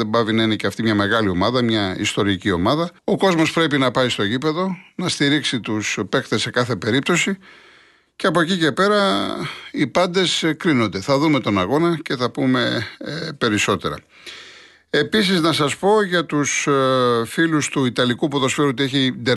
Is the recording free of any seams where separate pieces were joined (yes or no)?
no